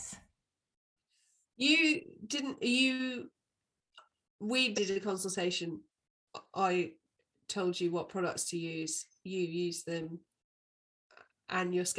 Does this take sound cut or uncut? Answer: cut